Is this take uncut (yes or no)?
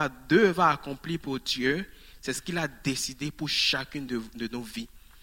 yes